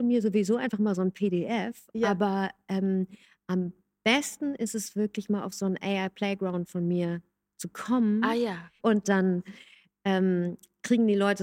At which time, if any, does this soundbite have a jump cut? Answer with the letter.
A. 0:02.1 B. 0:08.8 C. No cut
B